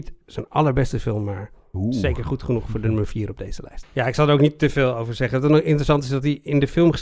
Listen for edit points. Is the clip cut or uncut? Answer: cut